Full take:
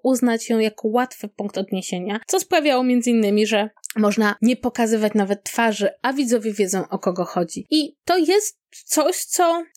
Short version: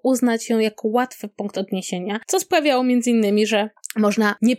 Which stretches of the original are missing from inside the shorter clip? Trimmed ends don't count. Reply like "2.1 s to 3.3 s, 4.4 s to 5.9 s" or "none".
none